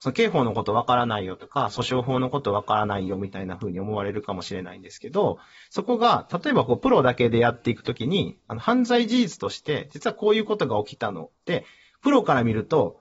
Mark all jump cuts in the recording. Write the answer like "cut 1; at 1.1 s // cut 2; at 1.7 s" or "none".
none